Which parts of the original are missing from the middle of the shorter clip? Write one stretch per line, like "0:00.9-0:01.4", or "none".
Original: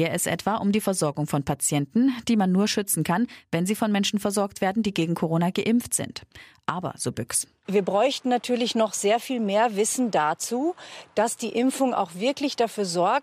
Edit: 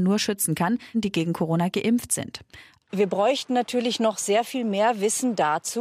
0:03.4-0:04.8
0:06.6-0:07.6